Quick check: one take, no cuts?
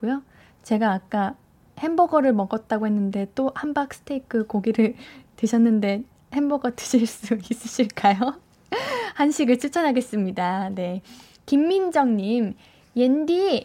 yes; 0 cuts

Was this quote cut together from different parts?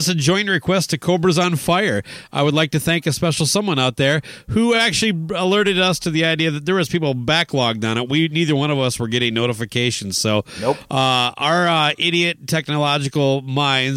no; 0 cuts

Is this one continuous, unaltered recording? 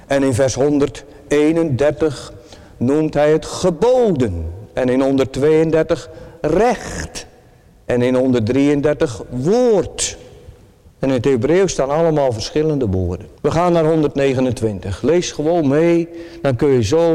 no; 1 cut; at 13.4 s

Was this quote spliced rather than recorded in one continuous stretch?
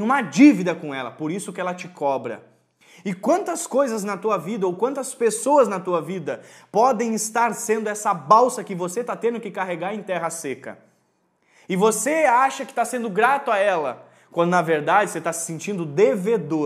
no; 0 cuts

